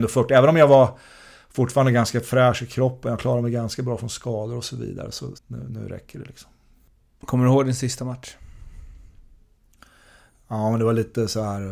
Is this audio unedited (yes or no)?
no